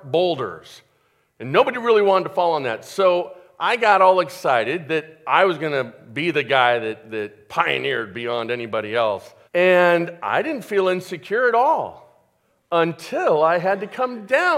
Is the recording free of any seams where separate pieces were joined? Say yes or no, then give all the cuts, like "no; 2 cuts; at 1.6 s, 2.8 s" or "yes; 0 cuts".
no; 1 cut; at 9.5 s